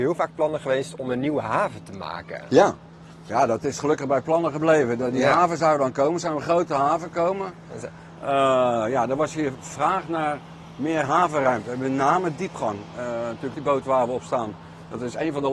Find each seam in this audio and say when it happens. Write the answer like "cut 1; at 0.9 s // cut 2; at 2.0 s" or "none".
cut 1; at 13.5 s

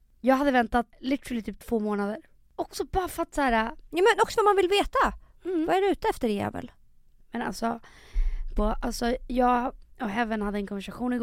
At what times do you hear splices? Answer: cut 1; at 8.6 s

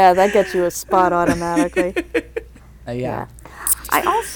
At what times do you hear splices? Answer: none

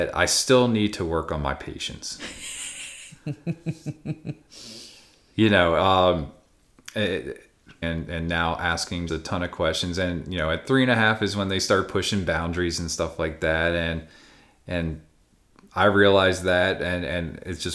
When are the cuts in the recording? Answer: cut 1; at 7.8 s // cut 2; at 9.1 s

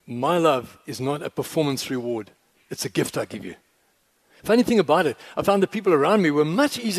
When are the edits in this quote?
cut 1; at 4.4 s

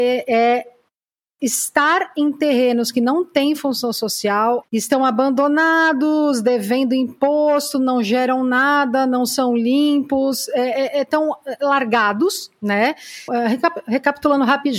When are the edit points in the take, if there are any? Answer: cut 1; at 4.6 s // cut 2; at 13.3 s

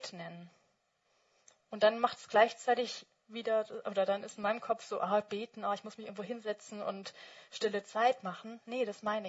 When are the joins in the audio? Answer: none

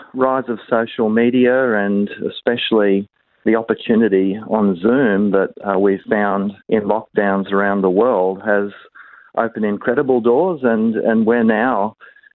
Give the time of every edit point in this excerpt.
cut 1; at 6.6 s

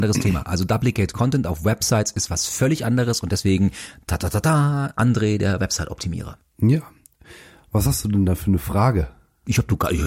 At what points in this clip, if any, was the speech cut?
none

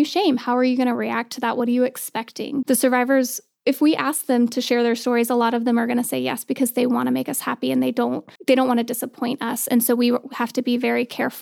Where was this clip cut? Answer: cut 1; at 2.6 s // cut 2; at 8.4 s

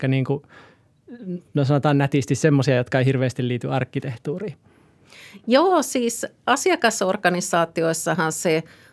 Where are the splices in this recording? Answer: none

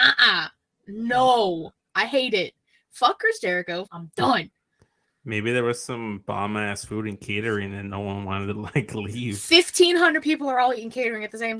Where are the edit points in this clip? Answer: cut 1; at 3.9 s

